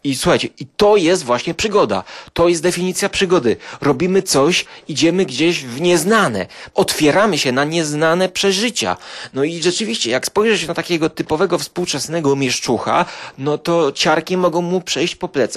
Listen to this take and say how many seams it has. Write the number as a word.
zero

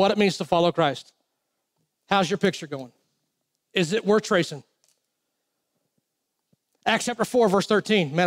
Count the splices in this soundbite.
zero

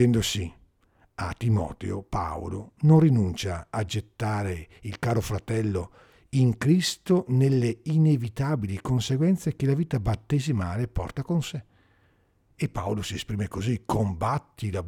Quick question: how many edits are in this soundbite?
zero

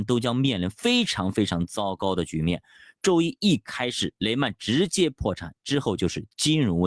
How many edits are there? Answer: zero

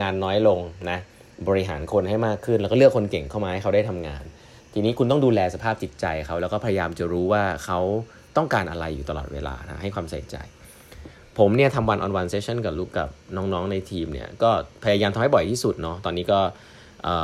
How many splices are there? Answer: one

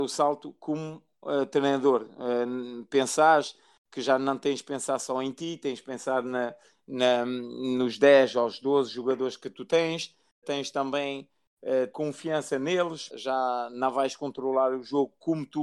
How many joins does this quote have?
three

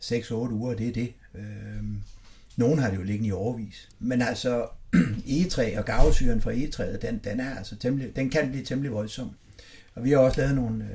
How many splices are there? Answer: one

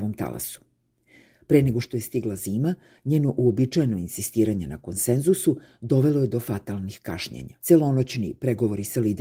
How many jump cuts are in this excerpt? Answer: one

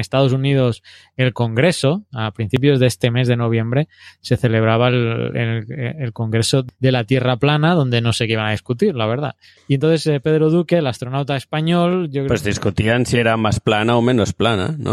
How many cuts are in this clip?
zero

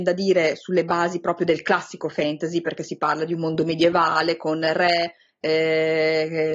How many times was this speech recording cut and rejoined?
zero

